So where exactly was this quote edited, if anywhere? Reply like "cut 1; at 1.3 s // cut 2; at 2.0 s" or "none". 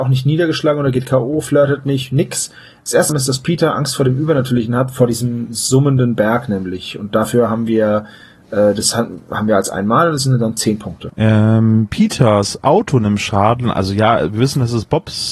cut 1; at 3.1 s

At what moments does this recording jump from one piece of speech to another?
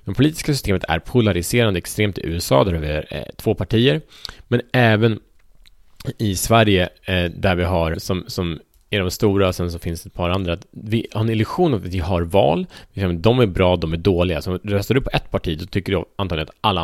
cut 1; at 7.9 s

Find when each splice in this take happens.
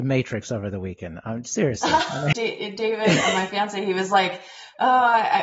cut 1; at 2.3 s

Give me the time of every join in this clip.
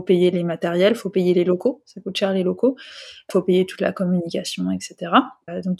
none

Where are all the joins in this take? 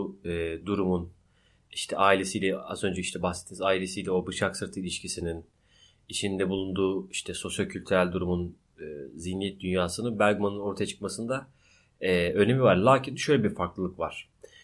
none

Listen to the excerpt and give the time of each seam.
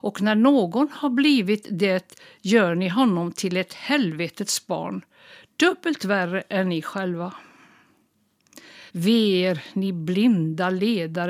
cut 1; at 8.9 s

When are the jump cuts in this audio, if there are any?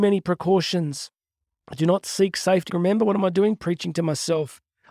cut 1; at 2.7 s

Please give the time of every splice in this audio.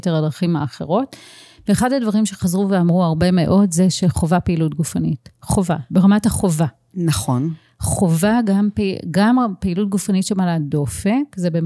none

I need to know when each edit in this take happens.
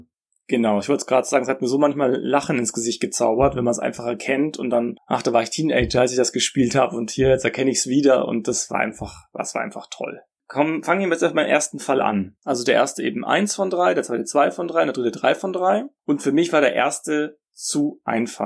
cut 1; at 12.4 s

